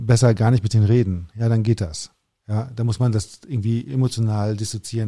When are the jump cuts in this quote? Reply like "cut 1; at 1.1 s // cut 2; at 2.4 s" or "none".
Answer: none